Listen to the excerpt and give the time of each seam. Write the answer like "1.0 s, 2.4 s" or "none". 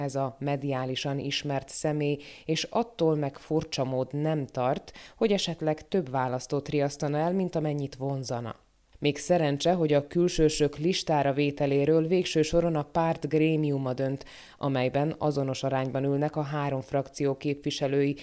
none